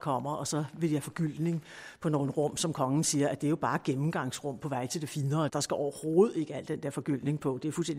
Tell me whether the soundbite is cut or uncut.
cut